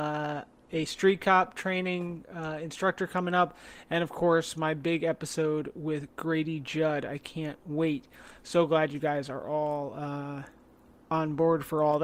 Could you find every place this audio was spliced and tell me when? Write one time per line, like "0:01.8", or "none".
none